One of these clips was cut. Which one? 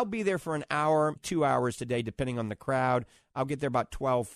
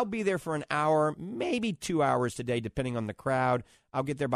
first; 1 cut; at 1.2 s

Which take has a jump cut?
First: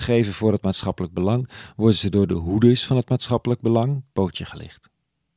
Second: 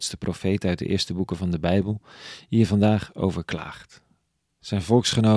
first; 1 cut; at 4.1 s

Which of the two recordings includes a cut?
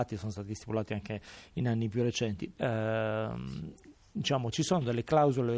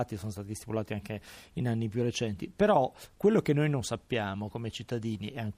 first; 2 cuts; at 2.6 s, 4.5 s

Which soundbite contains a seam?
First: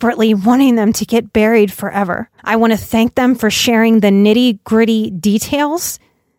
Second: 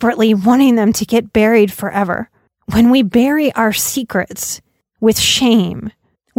first; 1 cut; at 2.4 s

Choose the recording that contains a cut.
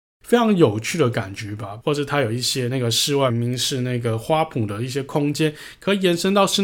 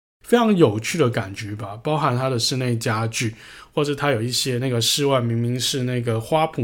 first; 2 cuts; at 1.8 s, 3.3 s

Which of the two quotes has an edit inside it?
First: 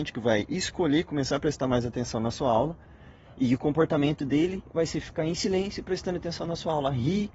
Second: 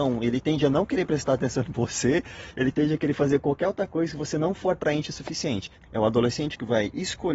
second; 1 cut; at 5.7 s

